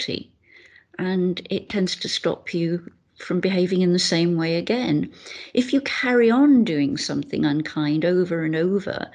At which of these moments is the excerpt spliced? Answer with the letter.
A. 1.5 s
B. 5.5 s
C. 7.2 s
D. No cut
D